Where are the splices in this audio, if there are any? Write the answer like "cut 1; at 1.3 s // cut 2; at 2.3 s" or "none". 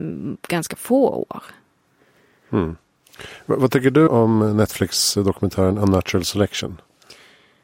cut 1; at 4.1 s